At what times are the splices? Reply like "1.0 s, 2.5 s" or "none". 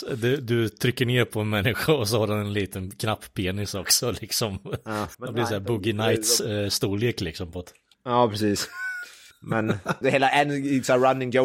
5.1 s, 10.0 s

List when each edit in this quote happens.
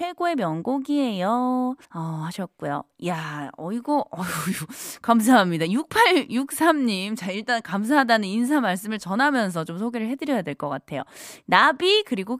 1.8 s

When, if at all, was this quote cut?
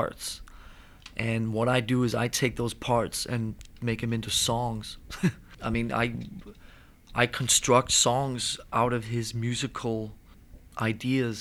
5.5 s

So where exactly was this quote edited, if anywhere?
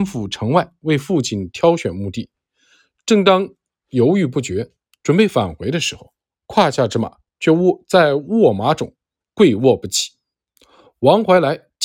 none

